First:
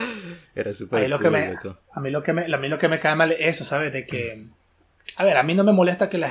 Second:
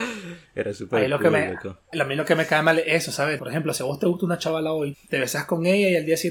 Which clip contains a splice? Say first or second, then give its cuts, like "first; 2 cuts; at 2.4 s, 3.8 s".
second; 3 cuts; at 1.9 s, 3.4 s, 4.9 s